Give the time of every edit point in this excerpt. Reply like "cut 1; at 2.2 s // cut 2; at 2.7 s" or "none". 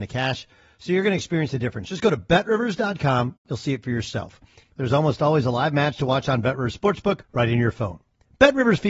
cut 1; at 4.6 s // cut 2; at 7.2 s